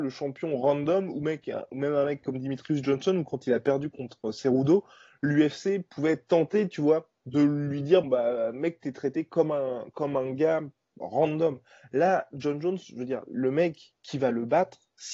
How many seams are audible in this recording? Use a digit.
1